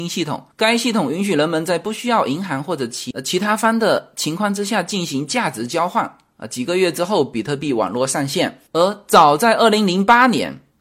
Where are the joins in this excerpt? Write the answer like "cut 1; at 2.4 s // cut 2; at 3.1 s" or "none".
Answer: cut 1; at 8.7 s

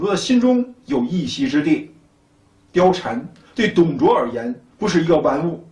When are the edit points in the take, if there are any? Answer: none

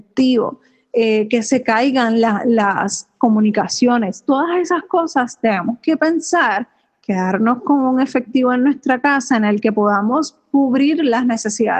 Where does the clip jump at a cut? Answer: none

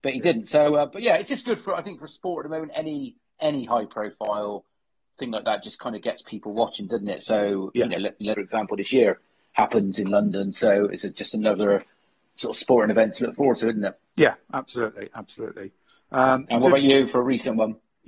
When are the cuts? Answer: cut 1; at 8.3 s

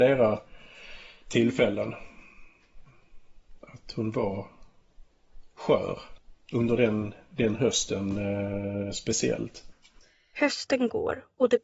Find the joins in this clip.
none

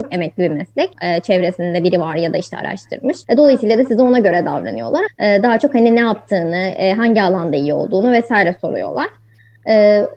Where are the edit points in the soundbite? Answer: cut 1; at 0.9 s // cut 2; at 3.2 s // cut 3; at 5.1 s

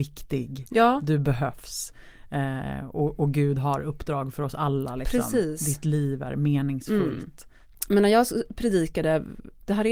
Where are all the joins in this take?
none

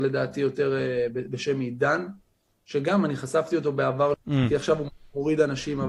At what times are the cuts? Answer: cut 1; at 4.1 s

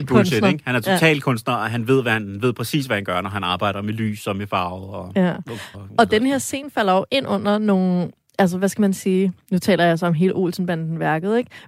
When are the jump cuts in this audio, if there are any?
cut 1; at 5.7 s

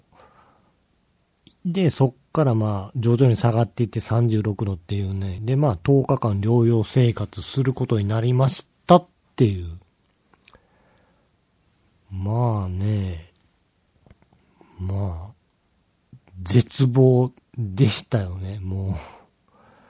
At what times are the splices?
none

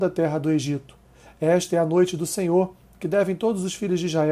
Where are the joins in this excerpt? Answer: none

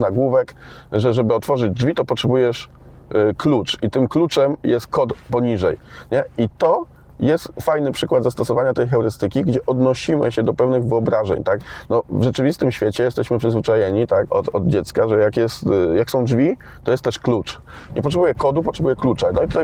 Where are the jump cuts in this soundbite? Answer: cut 1; at 14.3 s // cut 2; at 17.9 s

